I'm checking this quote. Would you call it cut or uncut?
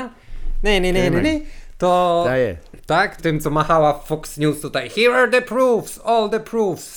cut